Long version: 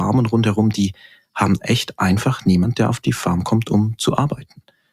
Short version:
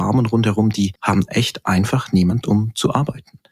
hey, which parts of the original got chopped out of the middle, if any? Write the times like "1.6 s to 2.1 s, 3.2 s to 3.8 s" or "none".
1.0 s to 1.3 s, 2.7 s to 3.6 s